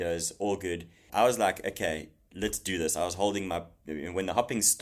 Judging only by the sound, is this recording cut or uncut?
cut